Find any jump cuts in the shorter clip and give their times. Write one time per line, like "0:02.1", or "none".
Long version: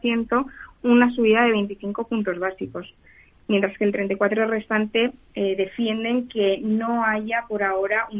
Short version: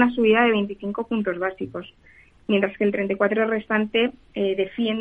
none